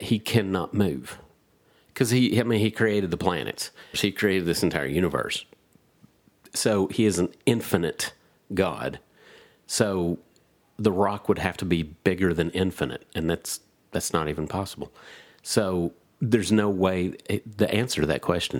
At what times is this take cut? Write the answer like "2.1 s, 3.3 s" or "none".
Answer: 3.9 s